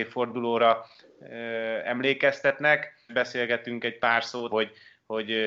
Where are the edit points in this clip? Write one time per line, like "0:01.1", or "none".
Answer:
0:03.1
0:04.5